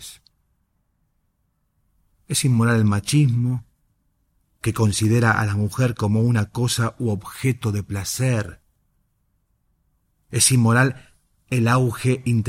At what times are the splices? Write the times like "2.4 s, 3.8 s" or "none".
none